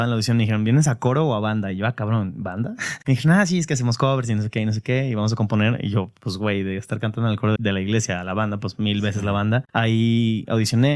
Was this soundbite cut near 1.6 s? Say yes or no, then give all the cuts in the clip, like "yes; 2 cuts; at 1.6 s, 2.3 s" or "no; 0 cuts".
no; 2 cuts; at 7.6 s, 9.7 s